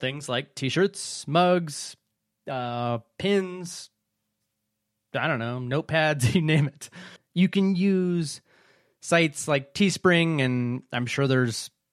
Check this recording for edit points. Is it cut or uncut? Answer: cut